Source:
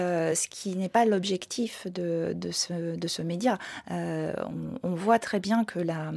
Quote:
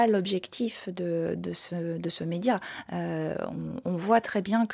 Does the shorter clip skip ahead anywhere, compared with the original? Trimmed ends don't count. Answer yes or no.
no